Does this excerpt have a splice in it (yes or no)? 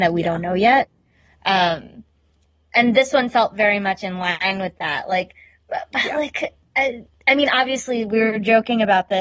no